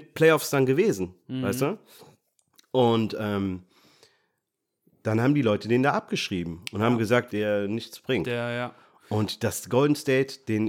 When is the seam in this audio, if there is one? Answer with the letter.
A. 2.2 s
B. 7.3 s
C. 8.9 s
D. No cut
B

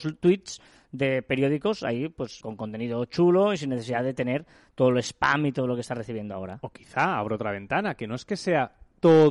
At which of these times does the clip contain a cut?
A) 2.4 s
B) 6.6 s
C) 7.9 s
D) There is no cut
A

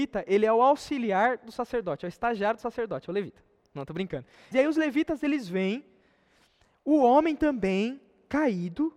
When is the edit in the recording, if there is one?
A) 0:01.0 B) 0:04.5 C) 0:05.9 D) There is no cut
B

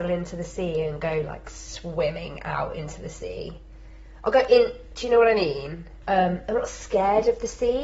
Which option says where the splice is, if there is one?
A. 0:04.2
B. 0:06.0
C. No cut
B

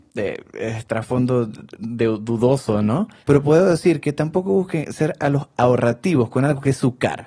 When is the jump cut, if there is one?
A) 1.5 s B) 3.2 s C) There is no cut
B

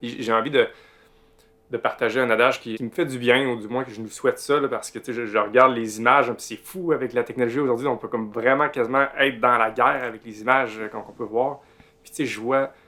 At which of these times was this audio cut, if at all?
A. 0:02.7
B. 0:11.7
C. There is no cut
A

